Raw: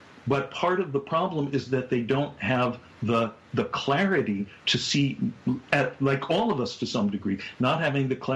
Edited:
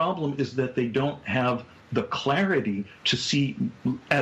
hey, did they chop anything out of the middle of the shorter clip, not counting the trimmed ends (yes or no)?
yes